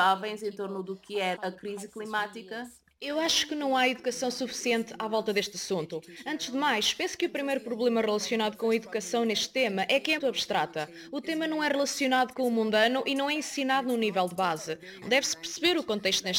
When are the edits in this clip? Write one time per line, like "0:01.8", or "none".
0:01.3
0:10.2
0:15.0